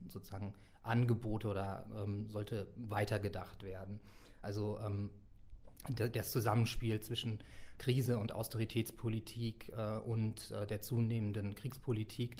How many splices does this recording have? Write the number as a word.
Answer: one